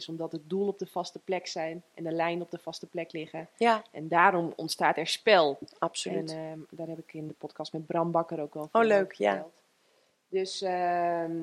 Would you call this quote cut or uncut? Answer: cut